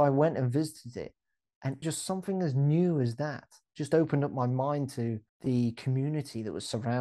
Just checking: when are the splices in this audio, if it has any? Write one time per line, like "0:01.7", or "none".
0:01.8
0:05.3